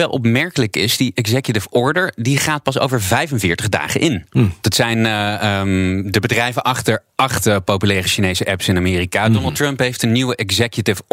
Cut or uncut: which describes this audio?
cut